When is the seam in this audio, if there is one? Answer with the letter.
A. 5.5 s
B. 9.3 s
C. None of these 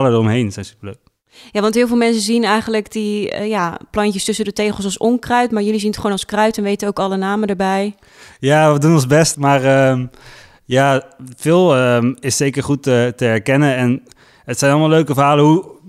B